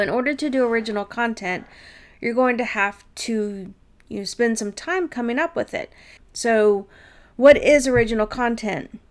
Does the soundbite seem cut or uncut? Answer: cut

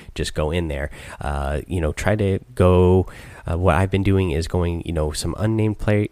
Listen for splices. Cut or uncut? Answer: uncut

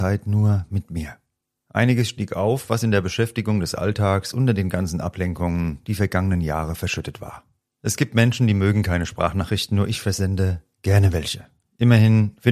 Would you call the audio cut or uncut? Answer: uncut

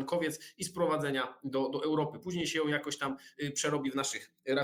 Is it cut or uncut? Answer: uncut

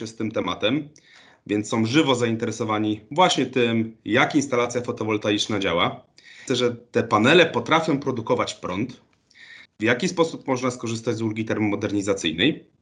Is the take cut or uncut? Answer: cut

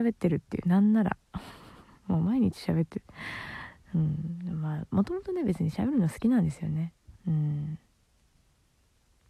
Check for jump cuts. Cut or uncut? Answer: uncut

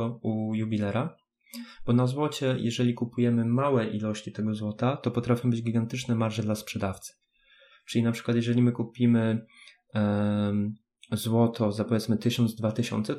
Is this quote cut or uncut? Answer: uncut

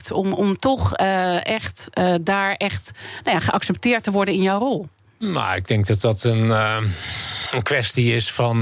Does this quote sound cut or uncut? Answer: uncut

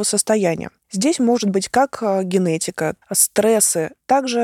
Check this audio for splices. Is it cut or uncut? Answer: cut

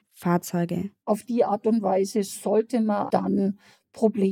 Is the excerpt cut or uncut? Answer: cut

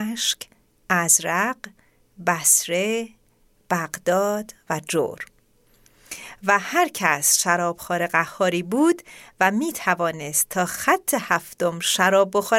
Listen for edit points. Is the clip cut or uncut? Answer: uncut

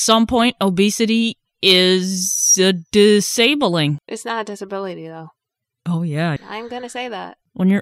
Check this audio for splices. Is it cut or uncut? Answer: cut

